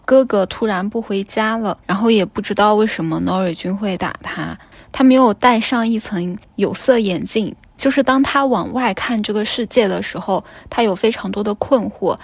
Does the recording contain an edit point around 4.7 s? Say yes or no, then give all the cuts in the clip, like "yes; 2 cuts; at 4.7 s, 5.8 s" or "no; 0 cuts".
yes; 1 cut; at 4.7 s